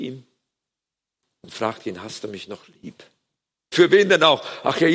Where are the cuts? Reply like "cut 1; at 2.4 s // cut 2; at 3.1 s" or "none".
cut 1; at 3.7 s